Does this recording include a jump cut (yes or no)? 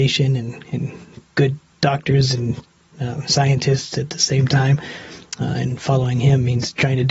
no